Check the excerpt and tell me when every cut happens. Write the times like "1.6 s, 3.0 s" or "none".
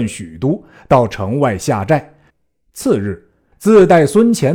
2.3 s, 3.5 s